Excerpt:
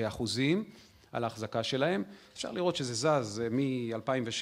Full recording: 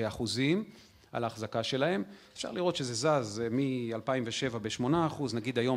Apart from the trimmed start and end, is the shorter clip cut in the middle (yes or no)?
no